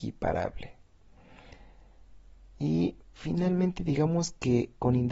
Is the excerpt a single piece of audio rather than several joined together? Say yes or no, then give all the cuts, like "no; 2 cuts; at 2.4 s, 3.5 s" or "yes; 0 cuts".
yes; 0 cuts